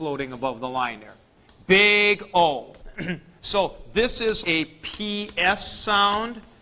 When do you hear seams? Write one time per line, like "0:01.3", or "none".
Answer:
0:02.8
0:04.4